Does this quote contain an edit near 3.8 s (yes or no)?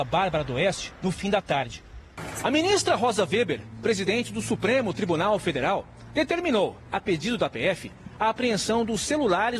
no